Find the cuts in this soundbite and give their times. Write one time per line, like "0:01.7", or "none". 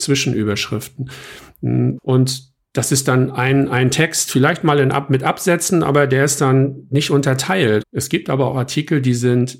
0:02.0
0:07.8